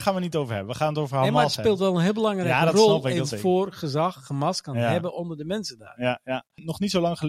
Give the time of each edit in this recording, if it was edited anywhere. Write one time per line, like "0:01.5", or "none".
0:03.3